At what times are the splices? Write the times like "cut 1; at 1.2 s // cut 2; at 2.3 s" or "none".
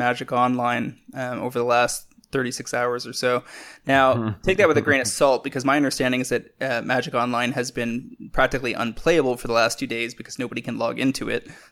none